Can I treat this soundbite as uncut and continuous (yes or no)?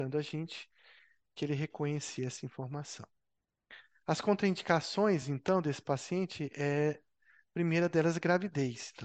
yes